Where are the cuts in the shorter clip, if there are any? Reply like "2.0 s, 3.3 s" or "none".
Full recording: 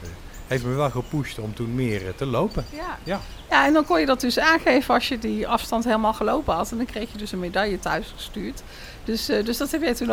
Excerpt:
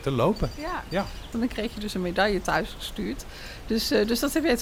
1.3 s